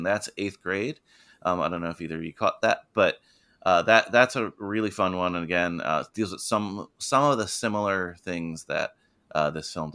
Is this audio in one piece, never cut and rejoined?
yes; 0 cuts

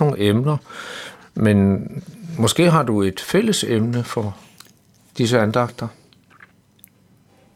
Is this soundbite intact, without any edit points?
yes; 0 cuts

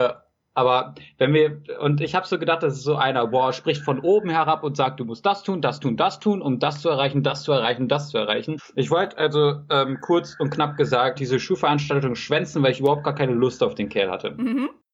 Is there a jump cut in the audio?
yes; 2 cuts; at 8.6 s, 11.2 s

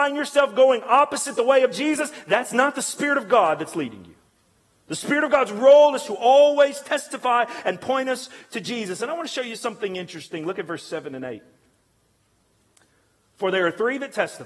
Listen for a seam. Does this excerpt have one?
no; 0 cuts

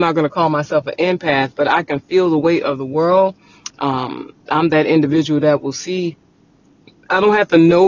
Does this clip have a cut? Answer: yes; 1 cut; at 3.7 s

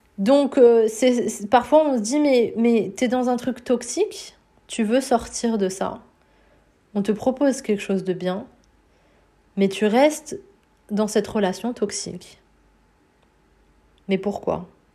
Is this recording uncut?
yes; 0 cuts

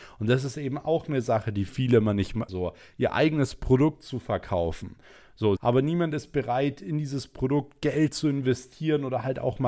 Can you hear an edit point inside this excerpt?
yes; 2 cuts; at 2.5 s, 5.6 s

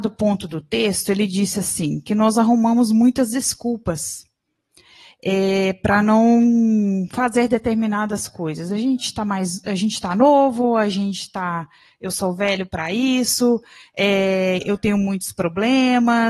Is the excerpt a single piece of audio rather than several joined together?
yes; 0 cuts

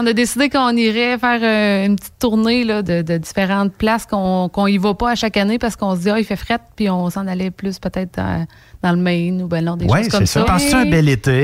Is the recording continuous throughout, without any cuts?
no; 2 cuts; at 2.8 s, 10.4 s

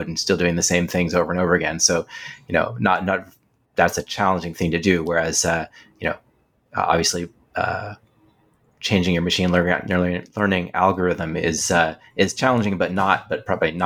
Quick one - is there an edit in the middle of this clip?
no; 0 cuts

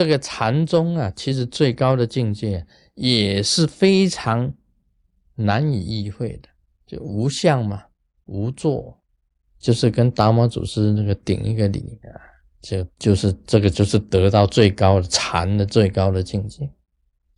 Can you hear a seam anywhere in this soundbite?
yes; 2 cuts; at 9.5 s, 12.9 s

